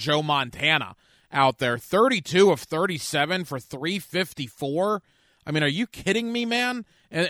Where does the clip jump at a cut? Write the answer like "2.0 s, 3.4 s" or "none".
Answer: none

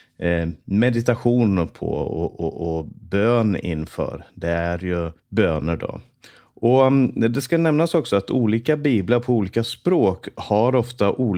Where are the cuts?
5.2 s

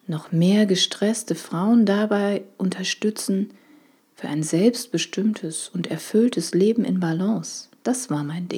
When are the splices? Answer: 4.0 s

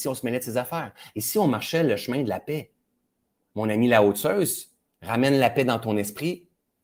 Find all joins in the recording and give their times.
none

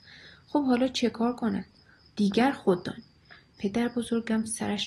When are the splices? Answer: 2.0 s

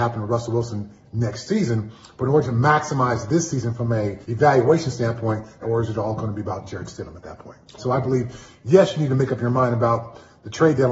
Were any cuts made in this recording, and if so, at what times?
4.2 s, 5.6 s, 7.8 s

